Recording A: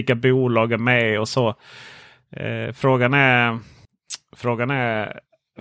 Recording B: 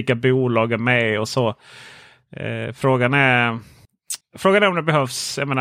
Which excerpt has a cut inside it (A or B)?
B